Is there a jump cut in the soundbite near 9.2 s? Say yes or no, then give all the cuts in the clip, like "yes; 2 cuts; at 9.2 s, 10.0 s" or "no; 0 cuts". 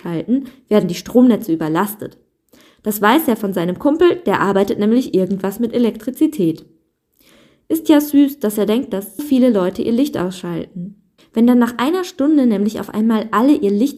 yes; 2 cuts; at 9.2 s, 11.2 s